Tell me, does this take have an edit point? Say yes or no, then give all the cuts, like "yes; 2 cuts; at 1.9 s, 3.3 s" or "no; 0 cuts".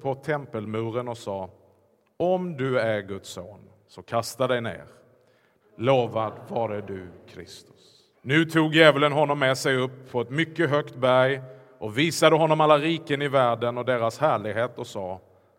yes; 2 cuts; at 5.6 s, 8.1 s